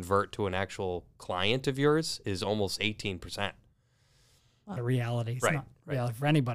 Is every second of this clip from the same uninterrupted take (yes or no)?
no